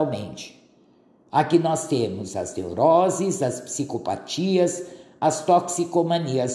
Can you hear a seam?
no; 0 cuts

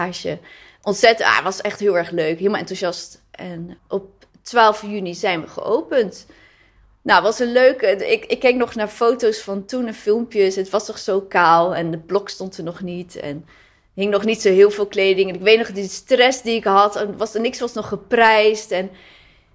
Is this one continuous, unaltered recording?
no; 1 cut; at 3.8 s

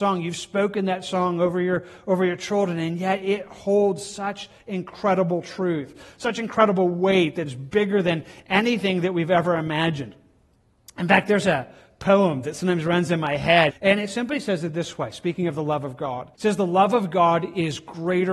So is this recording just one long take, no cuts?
no; 2 cuts; at 13.7 s, 16.3 s

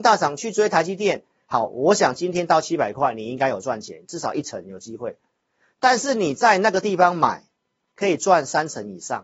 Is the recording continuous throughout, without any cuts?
yes; 0 cuts

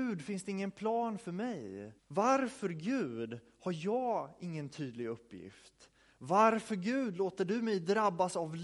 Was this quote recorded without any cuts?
no; 1 cut; at 2.0 s

